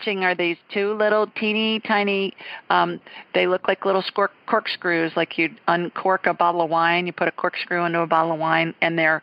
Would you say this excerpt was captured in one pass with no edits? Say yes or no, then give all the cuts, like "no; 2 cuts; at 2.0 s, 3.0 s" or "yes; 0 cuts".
yes; 0 cuts